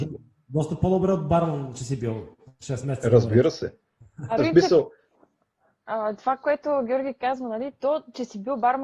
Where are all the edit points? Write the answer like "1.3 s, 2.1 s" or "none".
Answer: 4.4 s